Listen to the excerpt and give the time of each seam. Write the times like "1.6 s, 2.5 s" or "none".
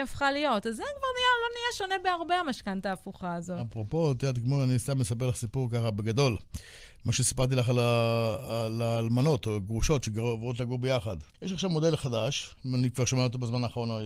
11.3 s